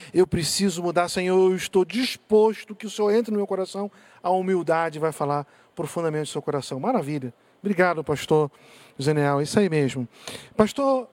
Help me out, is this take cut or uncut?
uncut